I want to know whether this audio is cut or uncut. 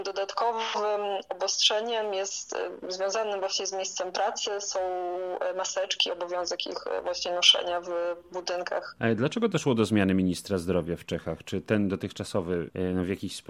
uncut